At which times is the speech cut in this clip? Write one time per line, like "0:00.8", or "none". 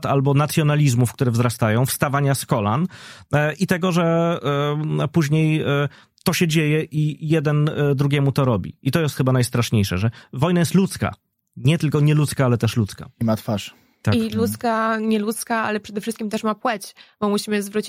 none